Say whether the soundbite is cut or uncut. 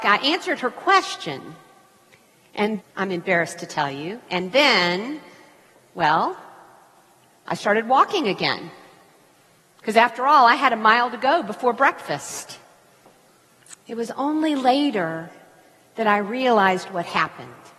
cut